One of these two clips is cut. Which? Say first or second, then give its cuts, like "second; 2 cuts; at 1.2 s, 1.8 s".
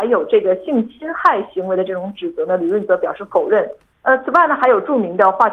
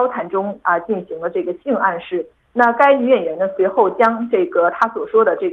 first; 1 cut; at 3.9 s